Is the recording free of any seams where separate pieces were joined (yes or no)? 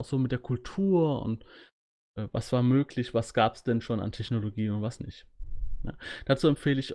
yes